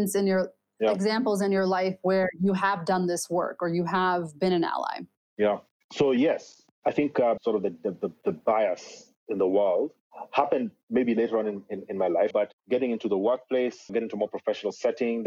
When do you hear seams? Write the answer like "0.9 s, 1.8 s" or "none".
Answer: 7.4 s, 12.3 s, 13.9 s